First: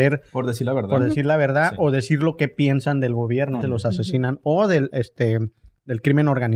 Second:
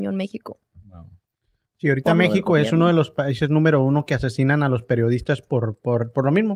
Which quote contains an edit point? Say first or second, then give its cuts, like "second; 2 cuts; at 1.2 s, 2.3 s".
first; 2 cuts; at 3.6 s, 4.9 s